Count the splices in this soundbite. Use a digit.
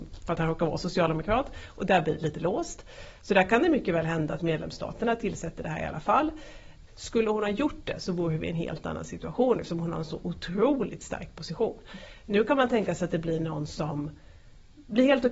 1